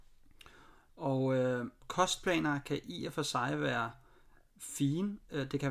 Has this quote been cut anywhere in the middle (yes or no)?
yes